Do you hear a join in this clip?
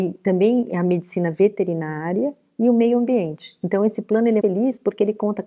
yes; 1 cut; at 4.4 s

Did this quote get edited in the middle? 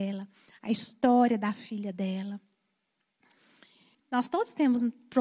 yes; 1 cut; at 3.9 s

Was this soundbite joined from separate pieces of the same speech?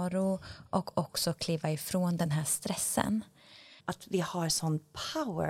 yes; 1 cut; at 3.8 s

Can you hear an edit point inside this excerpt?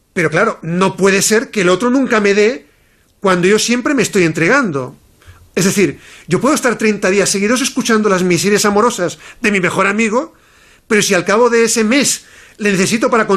no; 0 cuts

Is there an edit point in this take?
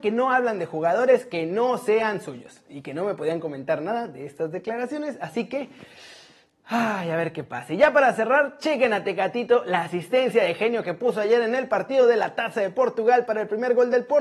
no; 0 cuts

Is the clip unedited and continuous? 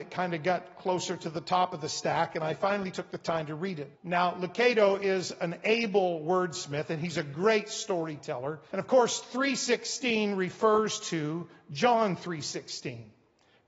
no; 2 cuts; at 3.9 s, 8.7 s

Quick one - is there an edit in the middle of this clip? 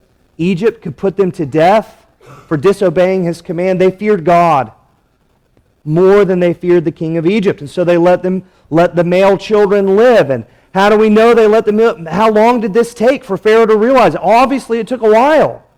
no; 0 cuts

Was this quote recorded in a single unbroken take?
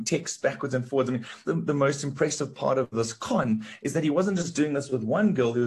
no; 1 cut; at 1.5 s

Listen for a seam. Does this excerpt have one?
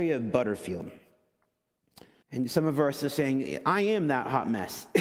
yes; 1 cut; at 2.2 s

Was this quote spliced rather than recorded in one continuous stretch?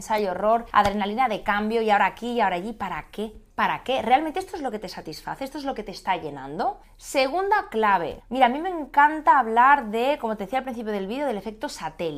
no; 0 cuts

